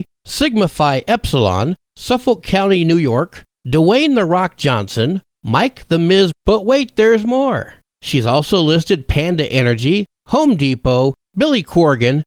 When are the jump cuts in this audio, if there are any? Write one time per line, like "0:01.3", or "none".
0:06.3